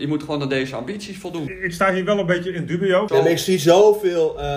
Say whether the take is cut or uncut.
cut